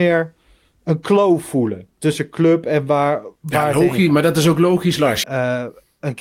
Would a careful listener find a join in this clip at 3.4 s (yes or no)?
yes